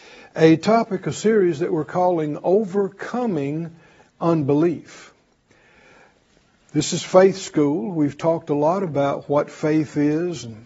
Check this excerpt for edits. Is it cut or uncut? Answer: uncut